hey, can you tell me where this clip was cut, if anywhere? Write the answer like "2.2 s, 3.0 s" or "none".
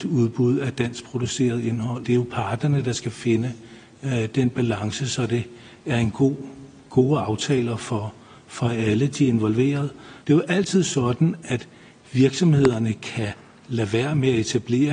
2.0 s, 10.2 s